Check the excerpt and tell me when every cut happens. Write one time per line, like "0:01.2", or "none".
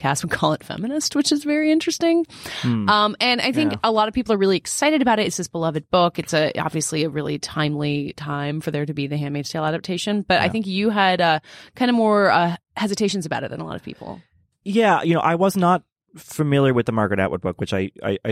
none